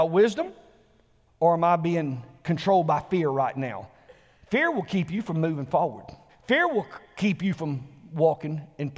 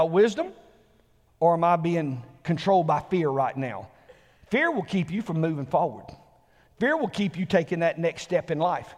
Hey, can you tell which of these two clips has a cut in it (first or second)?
first